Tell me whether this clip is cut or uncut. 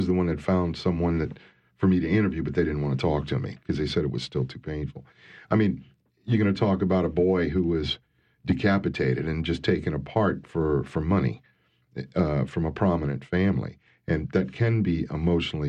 uncut